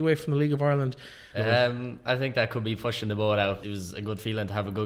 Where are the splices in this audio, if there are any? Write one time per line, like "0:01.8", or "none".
0:01.3
0:03.6